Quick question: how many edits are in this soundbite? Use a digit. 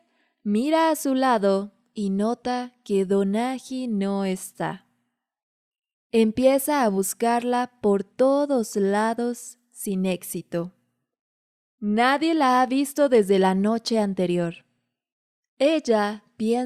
0